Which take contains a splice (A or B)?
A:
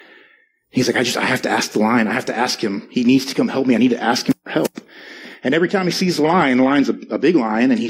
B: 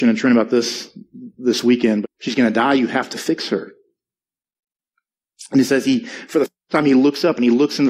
B